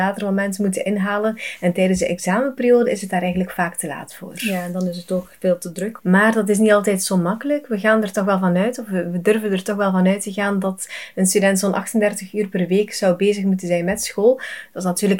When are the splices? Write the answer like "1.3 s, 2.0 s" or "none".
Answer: 6.0 s